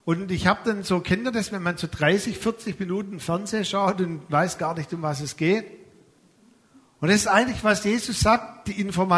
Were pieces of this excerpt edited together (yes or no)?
no